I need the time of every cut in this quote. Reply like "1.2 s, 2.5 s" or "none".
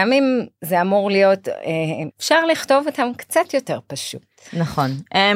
2.1 s